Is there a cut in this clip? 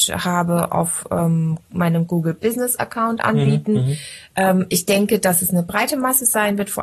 no; 0 cuts

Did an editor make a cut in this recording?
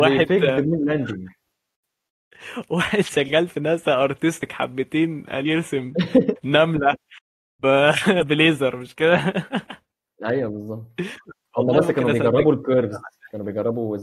no; 0 cuts

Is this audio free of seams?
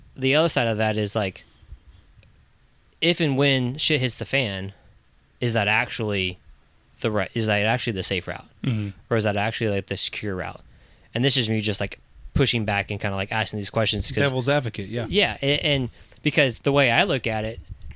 yes; 0 cuts

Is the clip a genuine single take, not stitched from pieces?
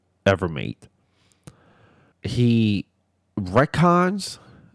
no; 1 cut; at 2.1 s

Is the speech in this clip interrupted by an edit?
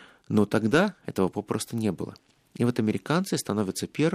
no; 0 cuts

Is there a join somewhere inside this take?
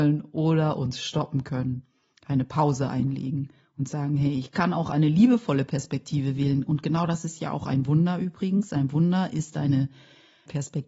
no; 0 cuts

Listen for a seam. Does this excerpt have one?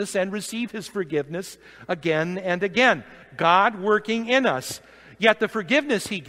no; 0 cuts

